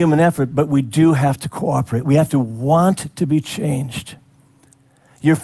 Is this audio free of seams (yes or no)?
yes